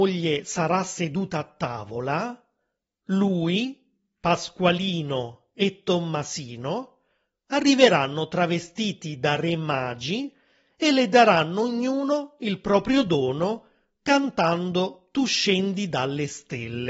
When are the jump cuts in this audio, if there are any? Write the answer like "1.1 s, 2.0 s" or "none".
none